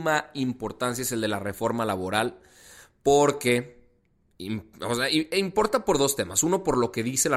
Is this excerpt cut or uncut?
uncut